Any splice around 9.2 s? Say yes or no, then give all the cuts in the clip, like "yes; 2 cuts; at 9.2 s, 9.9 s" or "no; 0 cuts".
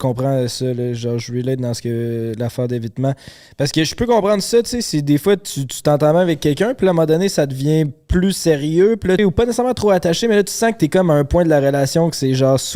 yes; 1 cut; at 9.2 s